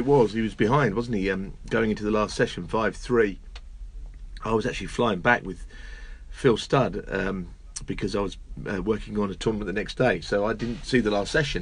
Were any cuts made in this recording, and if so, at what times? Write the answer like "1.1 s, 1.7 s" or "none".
none